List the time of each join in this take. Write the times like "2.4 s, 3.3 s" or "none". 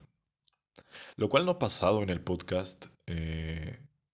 none